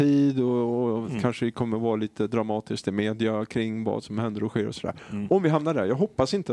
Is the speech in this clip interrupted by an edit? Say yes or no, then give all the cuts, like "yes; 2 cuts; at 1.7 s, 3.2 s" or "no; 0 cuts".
no; 0 cuts